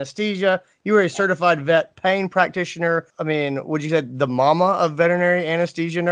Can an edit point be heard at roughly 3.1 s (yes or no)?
yes